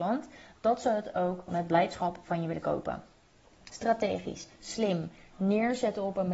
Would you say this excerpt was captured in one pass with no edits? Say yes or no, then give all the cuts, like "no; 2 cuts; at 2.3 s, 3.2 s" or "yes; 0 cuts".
no; 2 cuts; at 1.5 s, 3.7 s